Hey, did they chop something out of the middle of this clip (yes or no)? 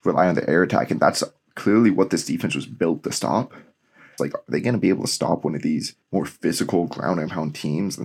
yes